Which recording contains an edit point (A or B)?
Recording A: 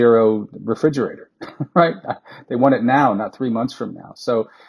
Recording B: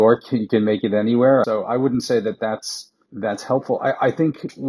B